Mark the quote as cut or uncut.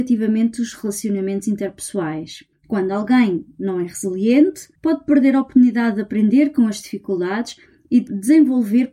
cut